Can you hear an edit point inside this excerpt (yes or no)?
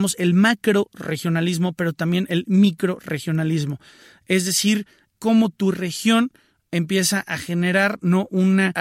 yes